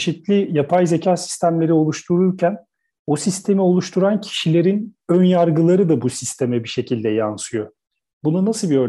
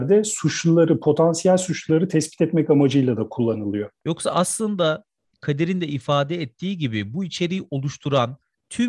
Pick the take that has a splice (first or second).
second